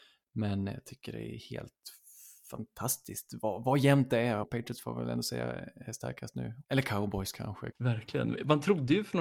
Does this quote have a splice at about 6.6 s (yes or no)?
yes